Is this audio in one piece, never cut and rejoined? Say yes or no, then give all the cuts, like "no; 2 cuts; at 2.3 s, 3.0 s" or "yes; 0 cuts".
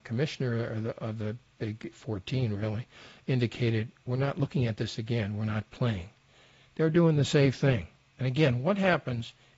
yes; 0 cuts